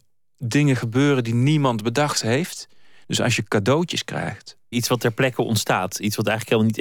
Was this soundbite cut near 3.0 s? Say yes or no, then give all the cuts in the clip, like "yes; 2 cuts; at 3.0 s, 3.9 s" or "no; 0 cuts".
no; 1 cut; at 4.7 s